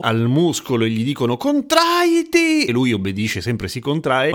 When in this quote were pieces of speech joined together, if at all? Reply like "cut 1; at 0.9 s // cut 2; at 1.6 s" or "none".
none